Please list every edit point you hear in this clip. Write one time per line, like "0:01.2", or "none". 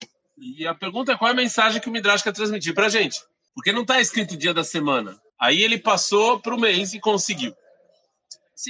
0:03.5
0:05.3